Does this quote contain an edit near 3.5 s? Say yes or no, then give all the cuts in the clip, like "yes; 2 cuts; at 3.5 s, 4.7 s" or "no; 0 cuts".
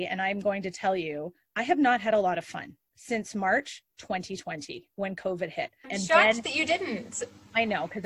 no; 1 cut; at 5.8 s